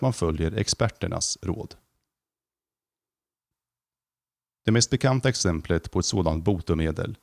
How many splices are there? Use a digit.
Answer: 0